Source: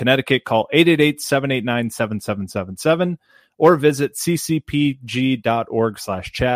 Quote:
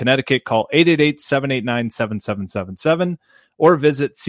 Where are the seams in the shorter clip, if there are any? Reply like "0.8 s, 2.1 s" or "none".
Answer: none

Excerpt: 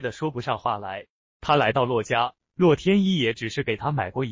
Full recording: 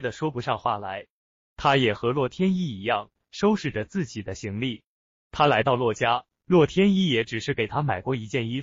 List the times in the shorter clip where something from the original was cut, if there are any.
1.2 s

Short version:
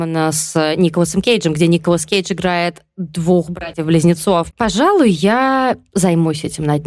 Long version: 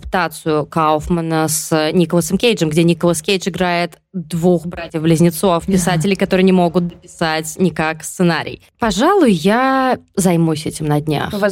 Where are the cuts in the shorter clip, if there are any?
4.5 s

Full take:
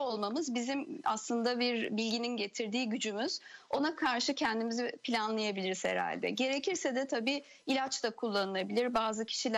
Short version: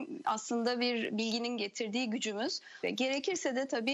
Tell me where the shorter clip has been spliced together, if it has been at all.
2.8 s

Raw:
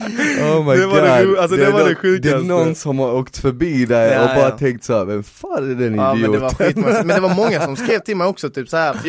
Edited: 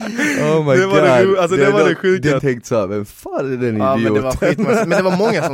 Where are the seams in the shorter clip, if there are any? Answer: 2.4 s

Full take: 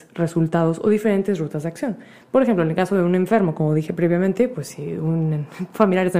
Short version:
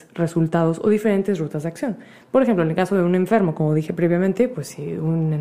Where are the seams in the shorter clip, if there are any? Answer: none

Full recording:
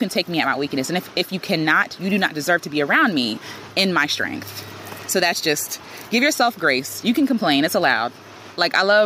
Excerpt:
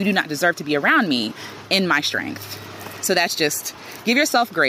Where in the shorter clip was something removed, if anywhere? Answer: none

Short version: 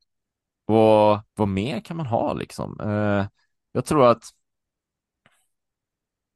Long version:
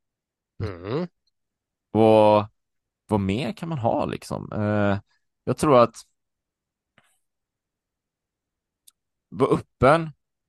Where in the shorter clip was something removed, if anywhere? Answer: 1.3 s

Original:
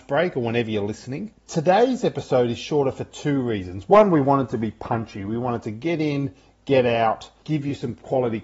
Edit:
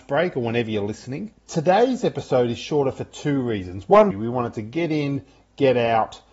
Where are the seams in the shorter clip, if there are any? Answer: 4.1 s

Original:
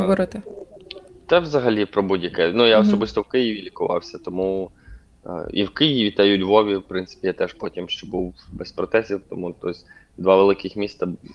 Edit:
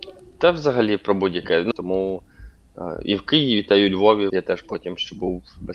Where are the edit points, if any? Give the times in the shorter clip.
1.7 s, 4.3 s

